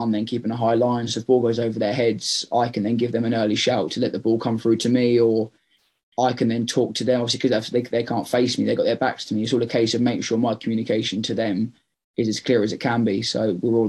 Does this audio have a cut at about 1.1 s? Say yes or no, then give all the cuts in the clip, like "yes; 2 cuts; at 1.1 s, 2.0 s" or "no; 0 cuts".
no; 0 cuts